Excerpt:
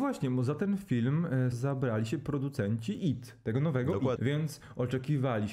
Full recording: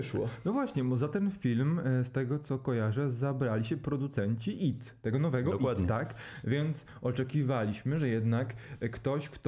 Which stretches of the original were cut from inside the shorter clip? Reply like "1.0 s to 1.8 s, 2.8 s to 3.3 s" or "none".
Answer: 2.1 s to 3.1 s, 5.7 s to 6.4 s